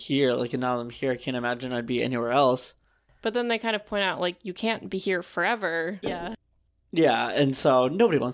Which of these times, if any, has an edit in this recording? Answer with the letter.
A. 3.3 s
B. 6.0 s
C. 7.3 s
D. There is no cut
B